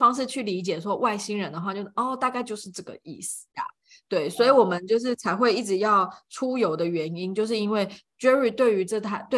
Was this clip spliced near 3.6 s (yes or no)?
yes